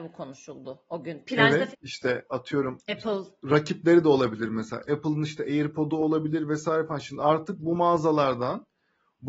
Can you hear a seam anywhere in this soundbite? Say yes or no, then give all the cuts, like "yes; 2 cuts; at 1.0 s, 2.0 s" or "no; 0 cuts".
yes; 1 cut; at 1.7 s